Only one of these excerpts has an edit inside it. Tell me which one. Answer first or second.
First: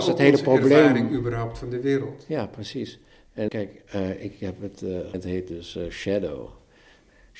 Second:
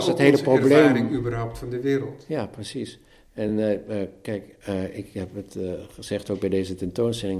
first